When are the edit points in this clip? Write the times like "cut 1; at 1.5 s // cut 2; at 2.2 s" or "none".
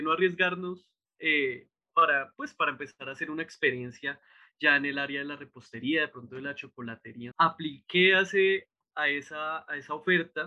cut 1; at 7.3 s